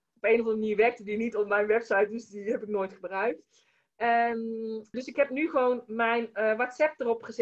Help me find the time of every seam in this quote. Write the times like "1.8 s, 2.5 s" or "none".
4.9 s